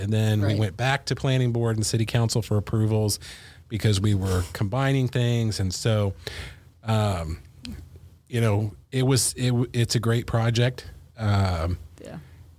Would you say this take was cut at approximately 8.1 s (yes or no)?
no